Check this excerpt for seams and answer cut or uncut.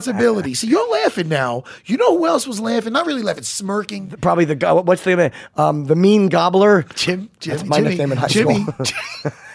uncut